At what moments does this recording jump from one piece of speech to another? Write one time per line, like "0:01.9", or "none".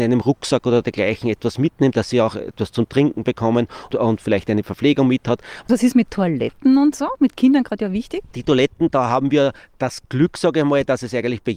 0:05.6